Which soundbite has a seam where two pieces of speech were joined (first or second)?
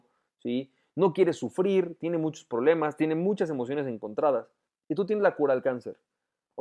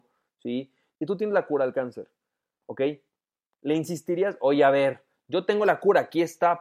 second